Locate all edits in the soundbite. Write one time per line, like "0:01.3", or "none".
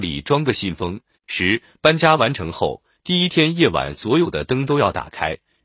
0:01.1